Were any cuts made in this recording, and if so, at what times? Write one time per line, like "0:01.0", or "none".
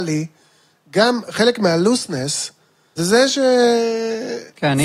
0:03.0